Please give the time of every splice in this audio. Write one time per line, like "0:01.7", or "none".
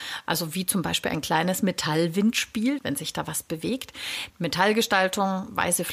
0:02.8
0:04.3